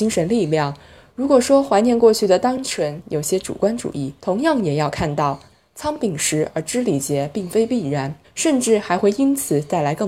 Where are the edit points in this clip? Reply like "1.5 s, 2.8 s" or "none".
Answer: 4.2 s, 8.2 s